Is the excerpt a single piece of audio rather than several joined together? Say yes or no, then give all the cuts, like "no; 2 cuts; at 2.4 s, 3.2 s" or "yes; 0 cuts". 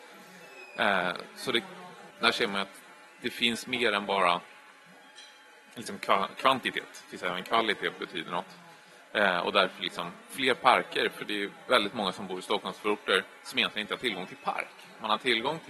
no; 1 cut; at 2.1 s